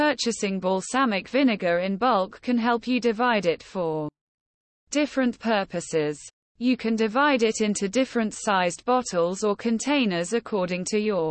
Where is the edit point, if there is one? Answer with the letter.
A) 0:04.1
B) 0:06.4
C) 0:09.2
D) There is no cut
D